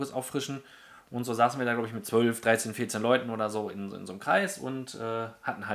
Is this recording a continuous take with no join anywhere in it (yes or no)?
yes